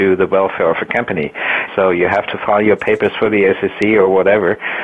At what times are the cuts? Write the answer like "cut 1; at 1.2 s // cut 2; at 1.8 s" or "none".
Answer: cut 1; at 1.7 s